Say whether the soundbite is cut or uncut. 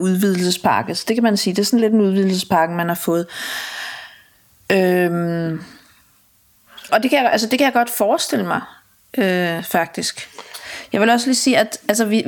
cut